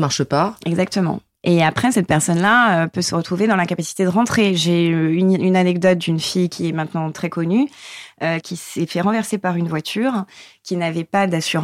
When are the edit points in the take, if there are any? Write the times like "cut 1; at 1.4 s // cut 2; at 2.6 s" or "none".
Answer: cut 1; at 8.4 s